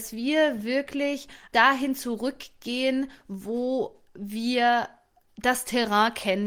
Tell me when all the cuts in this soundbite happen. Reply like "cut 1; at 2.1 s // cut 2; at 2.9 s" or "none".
cut 1; at 1.5 s